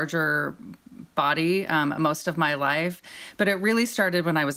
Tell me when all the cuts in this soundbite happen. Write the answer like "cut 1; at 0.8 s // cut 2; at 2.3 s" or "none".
none